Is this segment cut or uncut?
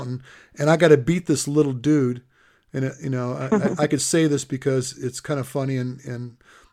uncut